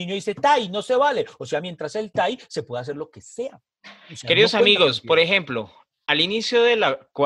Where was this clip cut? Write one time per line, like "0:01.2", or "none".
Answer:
none